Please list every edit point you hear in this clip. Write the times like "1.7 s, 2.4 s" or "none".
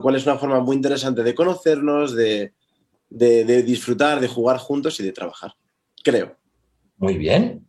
none